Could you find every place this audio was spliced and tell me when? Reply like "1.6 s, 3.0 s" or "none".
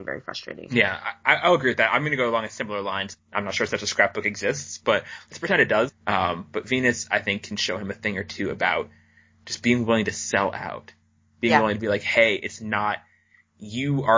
3.1 s, 5.9 s